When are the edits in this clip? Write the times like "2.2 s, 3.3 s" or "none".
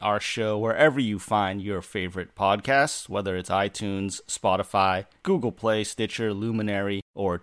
none